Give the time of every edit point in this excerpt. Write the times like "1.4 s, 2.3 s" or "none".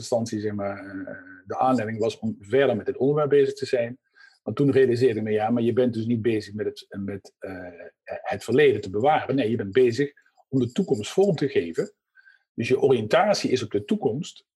none